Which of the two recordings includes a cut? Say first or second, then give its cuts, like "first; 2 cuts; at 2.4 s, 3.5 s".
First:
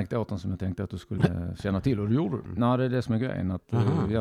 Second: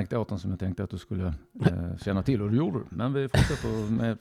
first; 2 cuts; at 1.2 s, 2.5 s